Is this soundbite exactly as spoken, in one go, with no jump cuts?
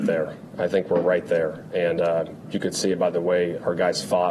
yes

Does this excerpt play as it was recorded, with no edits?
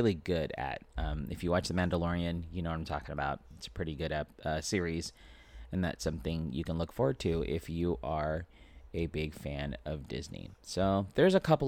yes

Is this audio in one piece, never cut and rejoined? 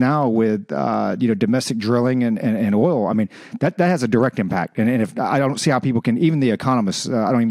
yes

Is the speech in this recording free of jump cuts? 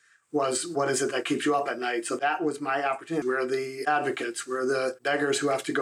no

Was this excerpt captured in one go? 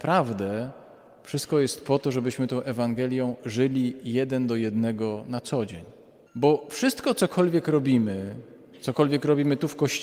no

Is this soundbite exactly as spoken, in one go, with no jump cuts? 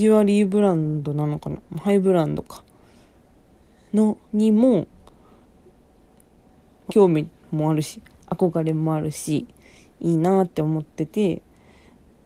no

